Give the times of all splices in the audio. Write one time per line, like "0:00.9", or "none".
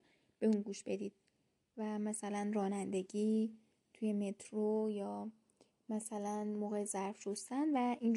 none